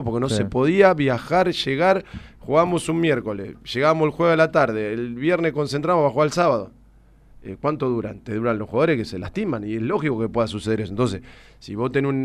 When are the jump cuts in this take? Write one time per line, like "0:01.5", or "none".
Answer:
none